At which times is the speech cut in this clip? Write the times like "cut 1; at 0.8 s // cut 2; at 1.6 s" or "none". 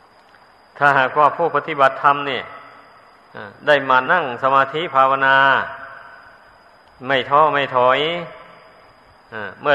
cut 1; at 4.1 s